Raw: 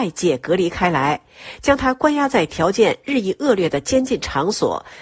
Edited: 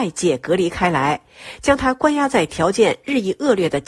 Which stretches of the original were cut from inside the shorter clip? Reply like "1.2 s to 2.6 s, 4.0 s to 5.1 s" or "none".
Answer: none